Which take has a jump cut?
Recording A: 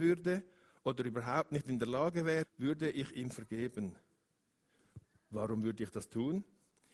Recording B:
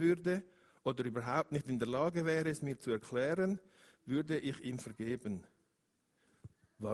A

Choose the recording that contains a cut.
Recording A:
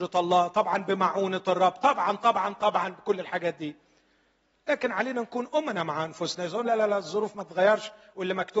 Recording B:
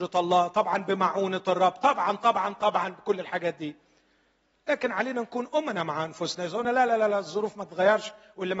A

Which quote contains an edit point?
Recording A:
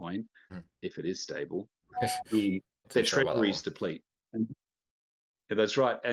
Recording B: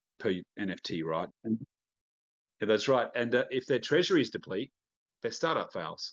B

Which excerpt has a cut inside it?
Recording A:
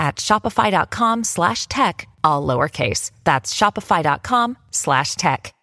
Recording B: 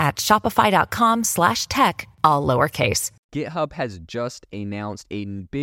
B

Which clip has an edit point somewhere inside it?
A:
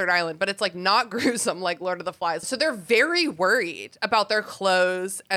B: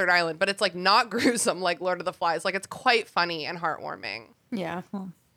A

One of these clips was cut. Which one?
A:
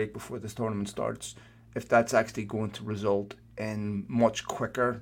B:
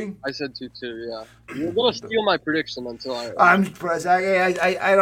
B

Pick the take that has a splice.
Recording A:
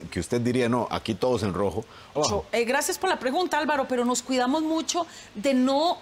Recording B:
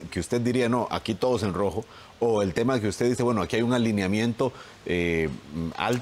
A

